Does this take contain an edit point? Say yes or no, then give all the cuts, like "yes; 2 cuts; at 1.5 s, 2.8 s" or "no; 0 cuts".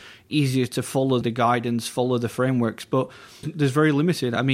yes; 2 cuts; at 1.2 s, 3.4 s